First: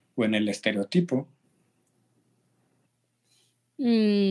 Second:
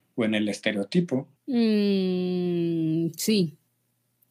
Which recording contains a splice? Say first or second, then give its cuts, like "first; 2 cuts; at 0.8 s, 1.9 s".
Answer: second; 1 cut; at 1.4 s